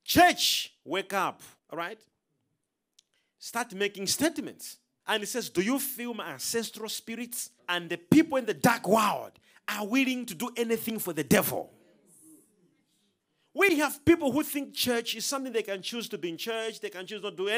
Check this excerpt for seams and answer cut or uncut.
cut